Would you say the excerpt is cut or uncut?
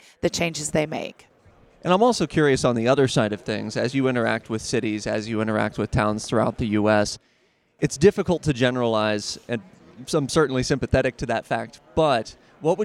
uncut